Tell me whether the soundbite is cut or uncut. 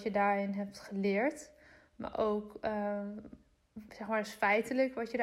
uncut